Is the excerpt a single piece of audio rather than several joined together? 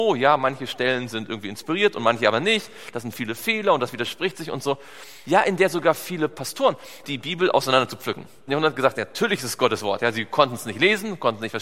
no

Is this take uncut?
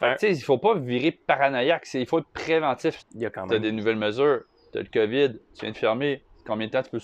no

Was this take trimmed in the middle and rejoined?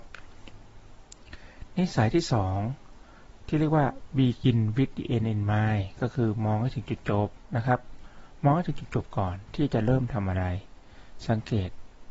no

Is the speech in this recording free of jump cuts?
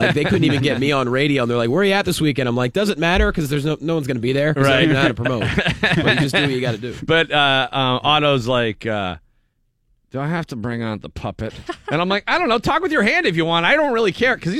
yes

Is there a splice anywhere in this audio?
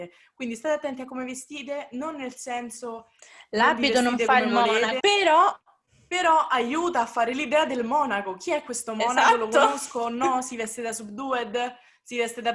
yes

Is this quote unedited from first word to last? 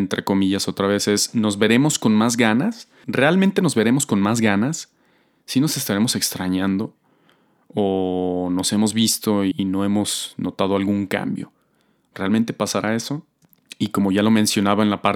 no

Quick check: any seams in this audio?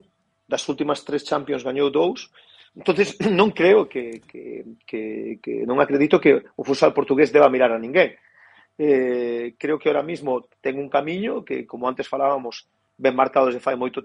yes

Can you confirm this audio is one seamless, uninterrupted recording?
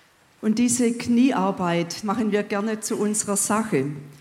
no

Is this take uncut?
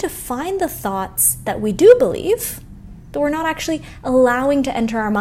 no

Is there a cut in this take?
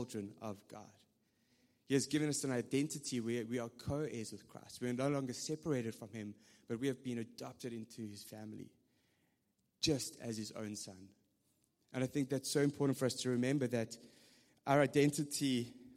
no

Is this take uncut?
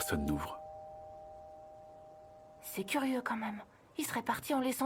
yes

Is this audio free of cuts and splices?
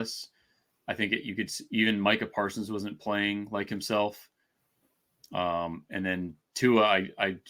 yes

